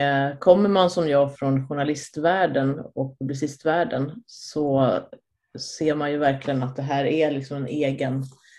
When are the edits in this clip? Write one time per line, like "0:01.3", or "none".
0:01.4